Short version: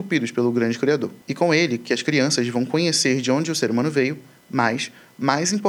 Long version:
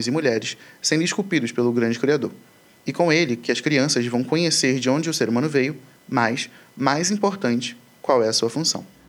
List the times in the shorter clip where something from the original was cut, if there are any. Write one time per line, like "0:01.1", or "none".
0:01.2